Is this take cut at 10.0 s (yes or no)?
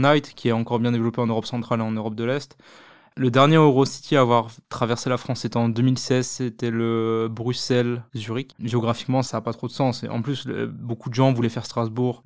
no